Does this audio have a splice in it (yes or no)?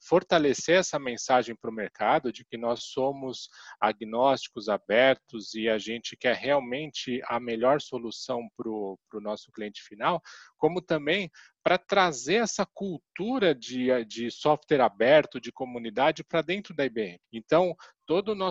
yes